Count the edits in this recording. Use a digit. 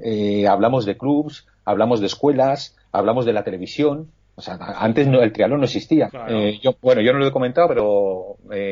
1